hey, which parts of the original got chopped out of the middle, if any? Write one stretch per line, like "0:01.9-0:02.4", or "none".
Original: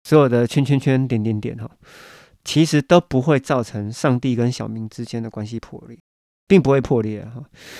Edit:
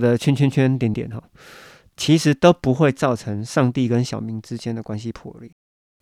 0:01.2-0:01.4